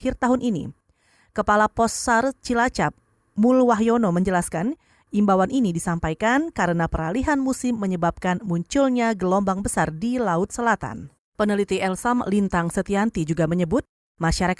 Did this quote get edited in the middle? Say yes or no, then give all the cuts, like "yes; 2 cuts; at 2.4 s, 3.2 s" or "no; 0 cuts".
yes; 1 cut; at 11.1 s